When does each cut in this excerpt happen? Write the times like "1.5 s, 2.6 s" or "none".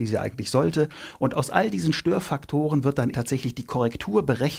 3.1 s